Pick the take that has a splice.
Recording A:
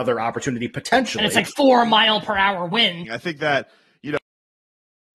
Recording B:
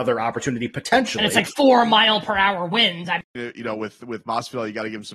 A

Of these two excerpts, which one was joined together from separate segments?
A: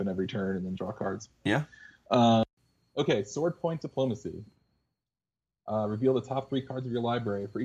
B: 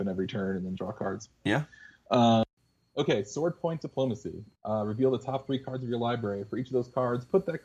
B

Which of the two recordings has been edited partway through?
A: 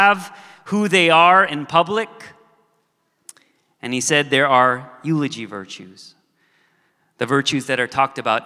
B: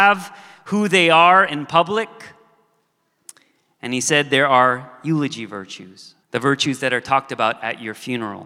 B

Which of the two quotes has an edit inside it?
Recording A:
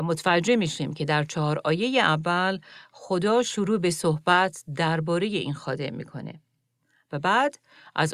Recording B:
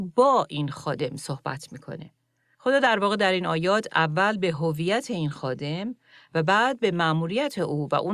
B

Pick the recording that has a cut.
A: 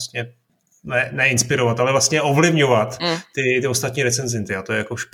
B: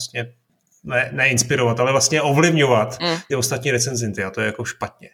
B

